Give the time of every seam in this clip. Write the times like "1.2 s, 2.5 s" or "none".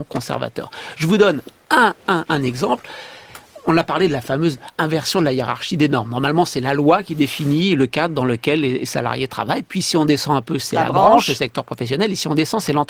none